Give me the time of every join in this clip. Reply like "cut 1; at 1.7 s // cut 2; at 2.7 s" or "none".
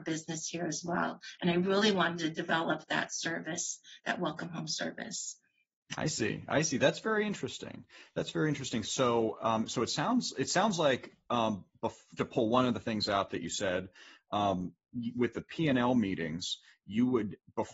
cut 1; at 12.2 s